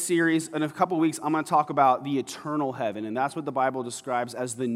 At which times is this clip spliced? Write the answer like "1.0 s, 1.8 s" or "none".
none